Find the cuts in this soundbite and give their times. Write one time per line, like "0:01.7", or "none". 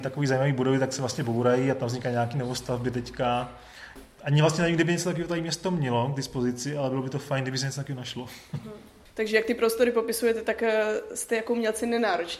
none